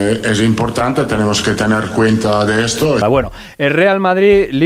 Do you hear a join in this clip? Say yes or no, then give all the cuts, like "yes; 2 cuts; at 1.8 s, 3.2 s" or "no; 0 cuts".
yes; 1 cut; at 3.0 s